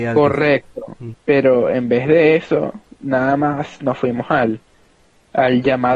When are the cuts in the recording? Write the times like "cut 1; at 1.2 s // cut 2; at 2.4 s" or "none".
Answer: cut 1; at 1.1 s